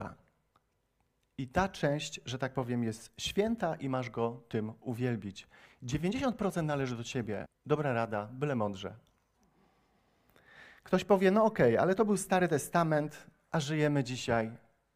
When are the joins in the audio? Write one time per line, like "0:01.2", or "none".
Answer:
0:07.5